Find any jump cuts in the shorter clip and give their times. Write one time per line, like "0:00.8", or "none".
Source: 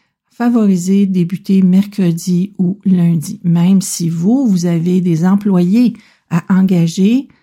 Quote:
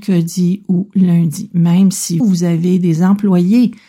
0:02.2